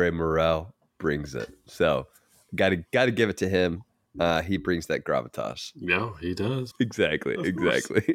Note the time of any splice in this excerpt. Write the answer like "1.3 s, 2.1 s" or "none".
6.7 s